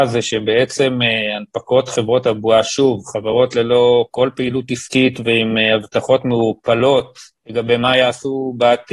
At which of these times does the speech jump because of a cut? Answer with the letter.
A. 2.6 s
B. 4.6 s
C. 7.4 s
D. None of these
C